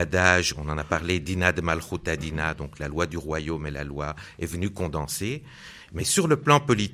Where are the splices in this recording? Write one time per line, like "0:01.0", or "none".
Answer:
none